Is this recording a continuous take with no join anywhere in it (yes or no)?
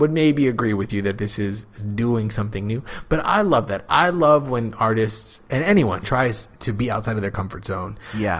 no